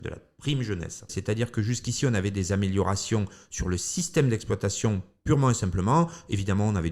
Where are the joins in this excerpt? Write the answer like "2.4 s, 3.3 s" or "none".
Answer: 1.1 s